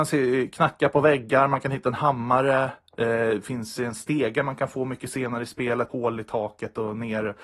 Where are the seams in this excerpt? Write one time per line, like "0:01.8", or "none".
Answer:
0:05.9